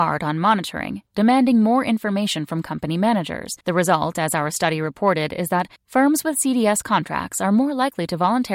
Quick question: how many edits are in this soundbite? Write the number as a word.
three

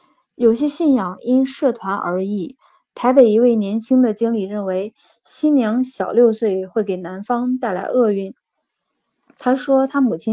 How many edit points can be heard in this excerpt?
zero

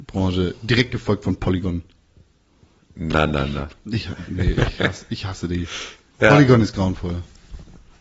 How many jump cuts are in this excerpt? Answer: zero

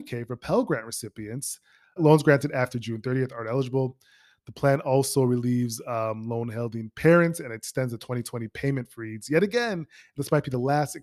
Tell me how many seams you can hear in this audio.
one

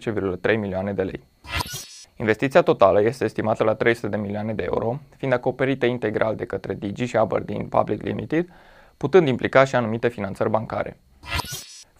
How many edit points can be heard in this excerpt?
one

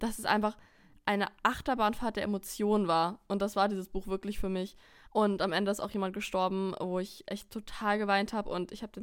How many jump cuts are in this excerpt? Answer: one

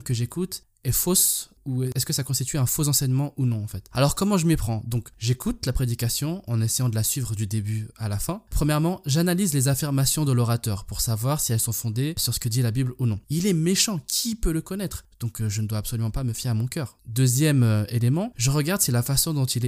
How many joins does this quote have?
three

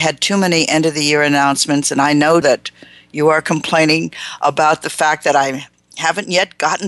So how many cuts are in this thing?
one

